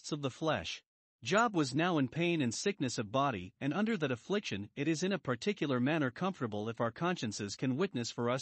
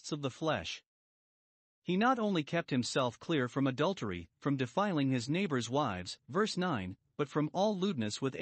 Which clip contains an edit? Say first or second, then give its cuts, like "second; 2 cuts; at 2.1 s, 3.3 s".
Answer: first; 1 cut; at 1.1 s